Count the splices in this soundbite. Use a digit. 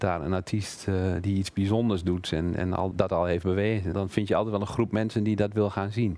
2